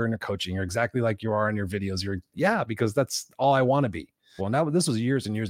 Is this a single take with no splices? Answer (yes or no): no